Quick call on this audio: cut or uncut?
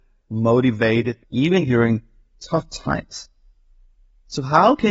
cut